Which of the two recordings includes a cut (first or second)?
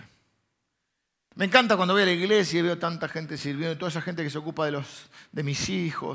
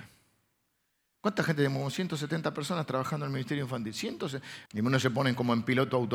second